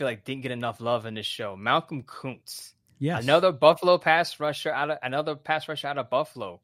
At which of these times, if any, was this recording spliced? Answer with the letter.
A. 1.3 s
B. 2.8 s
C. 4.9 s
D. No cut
D